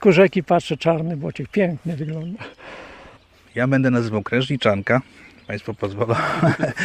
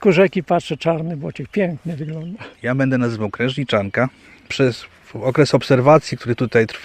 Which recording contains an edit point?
second; 2 cuts; at 2.5 s, 4.5 s

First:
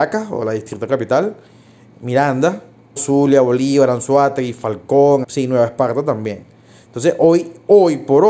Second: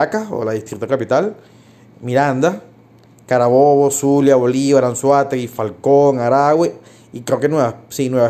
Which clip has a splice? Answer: first; 2 cuts; at 3.0 s, 5.2 s

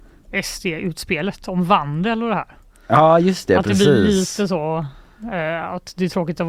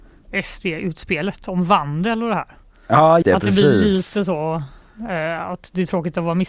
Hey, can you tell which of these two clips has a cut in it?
second; 1 cut; at 3.2 s

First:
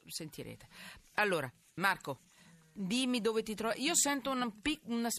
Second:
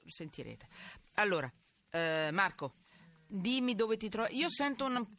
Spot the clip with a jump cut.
first; 1 cut; at 1.8 s

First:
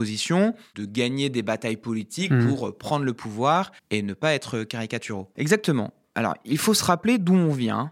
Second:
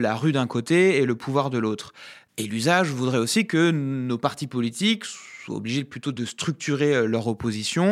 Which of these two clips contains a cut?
first; 2 cuts; at 3.8 s, 5.3 s

